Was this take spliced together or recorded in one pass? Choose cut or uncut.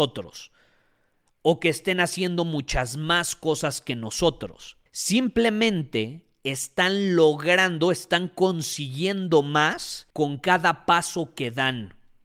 cut